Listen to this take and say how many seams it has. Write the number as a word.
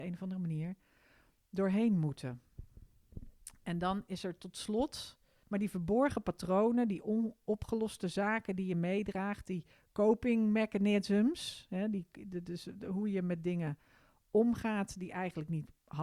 one